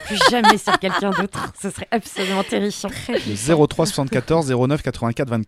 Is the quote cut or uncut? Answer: uncut